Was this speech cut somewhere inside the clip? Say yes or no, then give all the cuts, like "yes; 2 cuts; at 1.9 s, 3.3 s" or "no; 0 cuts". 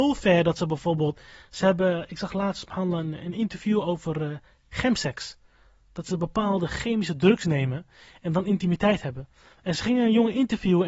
no; 0 cuts